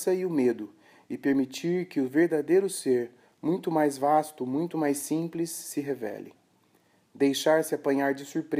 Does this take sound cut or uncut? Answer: uncut